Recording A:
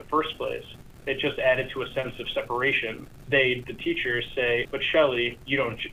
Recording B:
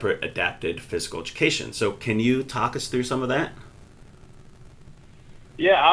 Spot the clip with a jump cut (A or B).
A